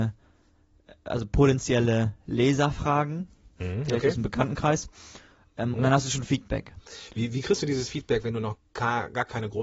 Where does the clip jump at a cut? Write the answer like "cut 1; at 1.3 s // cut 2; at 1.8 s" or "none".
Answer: cut 1; at 5.7 s